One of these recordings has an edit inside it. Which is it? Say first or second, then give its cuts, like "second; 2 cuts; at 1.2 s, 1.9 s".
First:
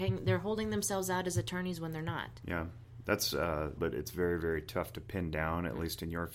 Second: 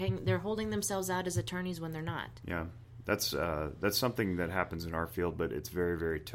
first; 1 cut; at 3.8 s